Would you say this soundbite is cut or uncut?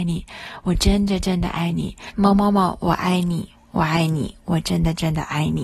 cut